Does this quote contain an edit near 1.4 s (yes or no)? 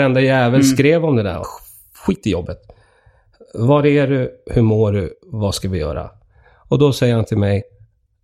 yes